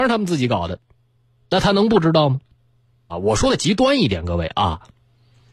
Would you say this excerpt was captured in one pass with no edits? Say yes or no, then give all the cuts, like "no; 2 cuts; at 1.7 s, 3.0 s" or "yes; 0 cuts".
no; 1 cut; at 3.1 s